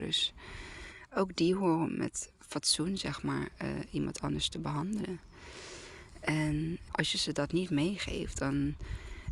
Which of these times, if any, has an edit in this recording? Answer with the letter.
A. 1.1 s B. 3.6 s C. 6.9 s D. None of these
C